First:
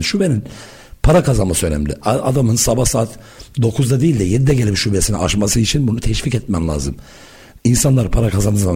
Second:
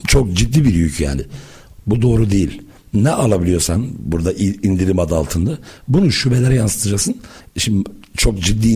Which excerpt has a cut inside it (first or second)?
second